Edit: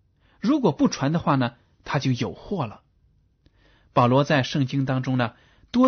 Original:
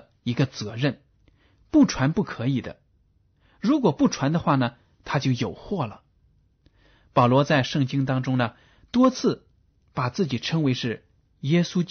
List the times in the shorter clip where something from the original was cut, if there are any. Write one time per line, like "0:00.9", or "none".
none